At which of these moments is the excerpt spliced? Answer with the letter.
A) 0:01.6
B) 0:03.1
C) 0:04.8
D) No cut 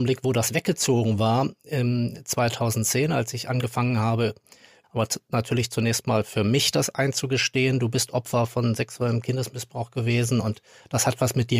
C